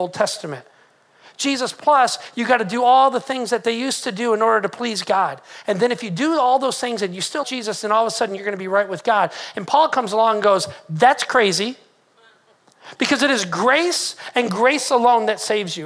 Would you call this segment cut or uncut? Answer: cut